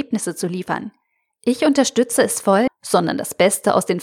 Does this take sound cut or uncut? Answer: cut